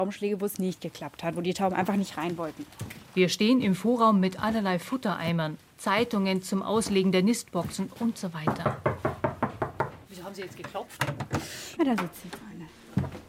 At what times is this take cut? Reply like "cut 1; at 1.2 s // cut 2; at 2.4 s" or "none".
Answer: cut 1; at 5.7 s // cut 2; at 10.0 s // cut 3; at 11.8 s